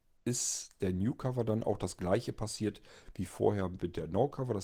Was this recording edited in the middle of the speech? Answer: no; 0 cuts

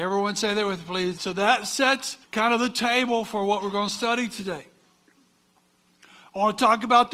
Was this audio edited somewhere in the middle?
yes; 2 cuts; at 1.2 s, 2.2 s

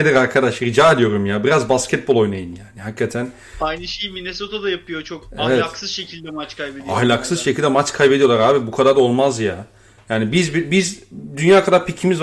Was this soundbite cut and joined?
no; 0 cuts

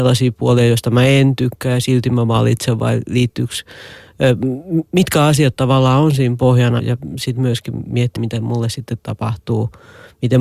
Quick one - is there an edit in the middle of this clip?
yes; 2 cuts; at 6.8 s, 8.2 s

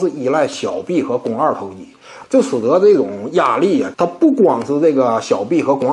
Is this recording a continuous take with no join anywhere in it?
no; 2 cuts; at 2.2 s, 3.9 s

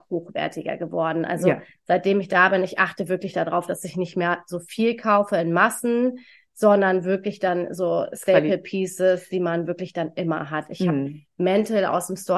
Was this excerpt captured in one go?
yes; 0 cuts

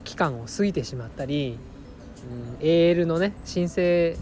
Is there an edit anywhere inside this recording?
no; 0 cuts

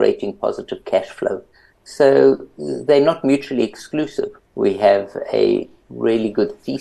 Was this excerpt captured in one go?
no; 2 cuts; at 1.7 s, 4.4 s

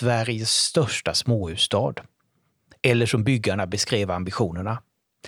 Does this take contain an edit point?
no; 0 cuts

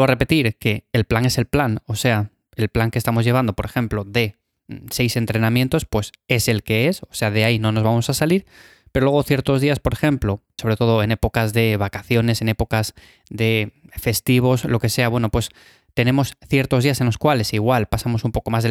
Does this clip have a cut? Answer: yes; 1 cut; at 10.6 s

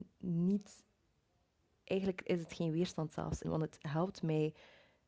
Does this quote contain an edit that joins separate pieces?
yes; 1 cut; at 3.4 s

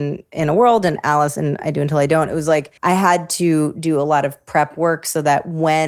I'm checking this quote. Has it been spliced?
yes; 1 cut; at 2.8 s

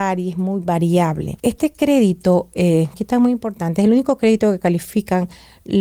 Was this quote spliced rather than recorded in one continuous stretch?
yes; 2 cuts; at 1.4 s, 2.9 s

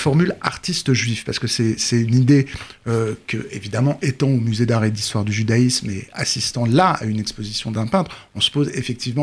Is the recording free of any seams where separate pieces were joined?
yes; 0 cuts

